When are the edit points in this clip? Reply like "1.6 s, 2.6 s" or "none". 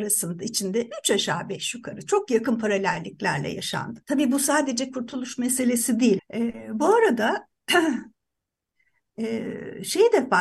4.0 s, 6.2 s